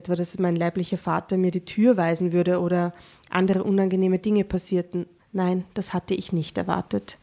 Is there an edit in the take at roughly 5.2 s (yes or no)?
yes